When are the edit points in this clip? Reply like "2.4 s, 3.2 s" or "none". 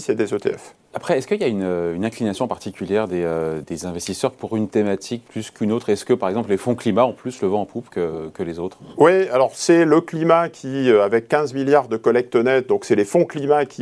3.6 s

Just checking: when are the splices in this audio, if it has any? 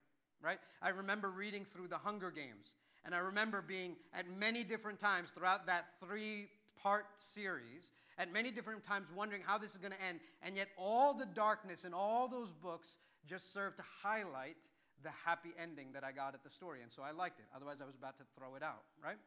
none

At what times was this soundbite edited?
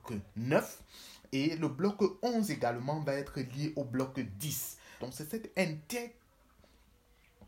5.0 s

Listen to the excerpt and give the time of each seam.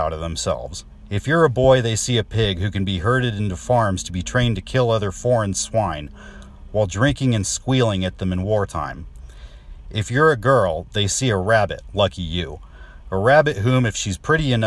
none

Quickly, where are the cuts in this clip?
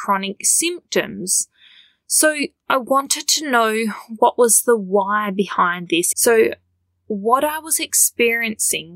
6.1 s

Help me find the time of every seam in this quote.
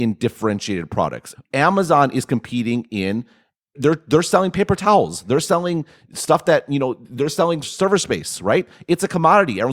1.3 s, 3.7 s, 7.6 s

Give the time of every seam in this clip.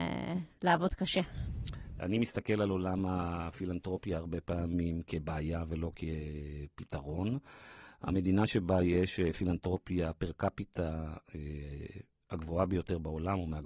2.0 s

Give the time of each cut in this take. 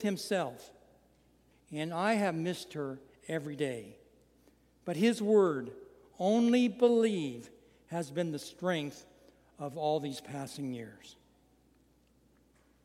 1.5 s

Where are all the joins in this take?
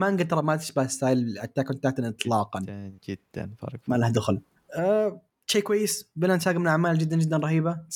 none

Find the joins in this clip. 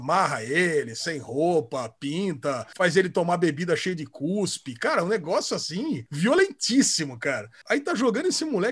7.6 s

